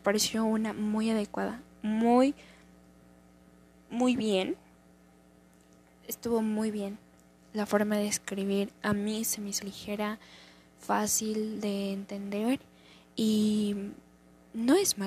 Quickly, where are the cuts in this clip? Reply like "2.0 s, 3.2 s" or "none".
9.6 s

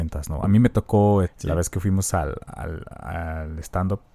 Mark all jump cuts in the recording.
1.2 s

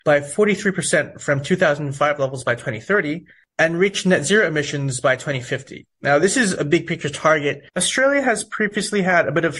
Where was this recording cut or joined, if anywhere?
7.7 s

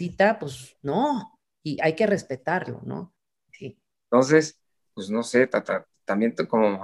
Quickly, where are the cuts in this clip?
3.5 s, 4.9 s

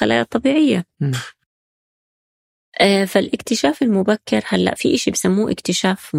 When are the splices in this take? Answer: 4.8 s

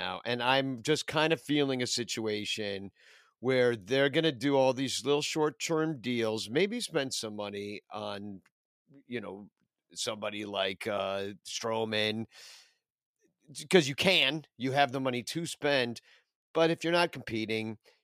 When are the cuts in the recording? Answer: none

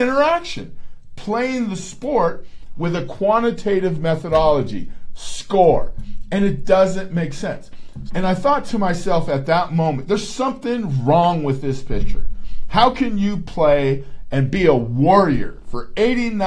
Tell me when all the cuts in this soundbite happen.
8.1 s

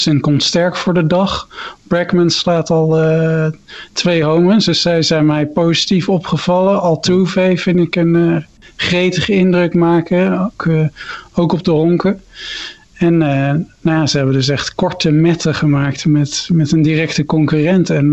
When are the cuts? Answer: none

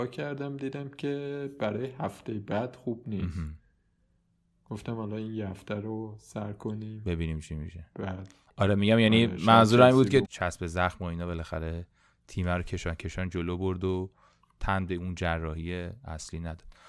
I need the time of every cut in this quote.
10.2 s

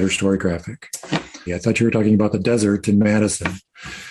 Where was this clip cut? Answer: 1.5 s

